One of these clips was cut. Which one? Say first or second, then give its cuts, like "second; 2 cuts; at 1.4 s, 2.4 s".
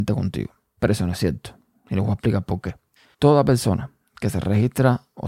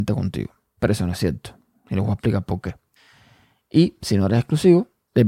first; 1 cut; at 3.0 s